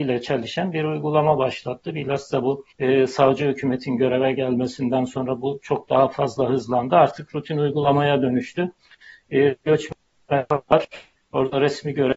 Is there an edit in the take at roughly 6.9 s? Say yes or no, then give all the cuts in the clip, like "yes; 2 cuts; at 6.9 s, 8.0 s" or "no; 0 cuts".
no; 1 cut; at 2.7 s